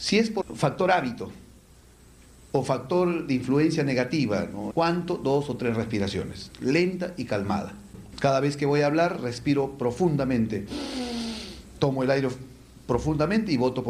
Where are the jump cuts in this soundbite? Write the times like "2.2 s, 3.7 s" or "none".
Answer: 4.7 s, 8.1 s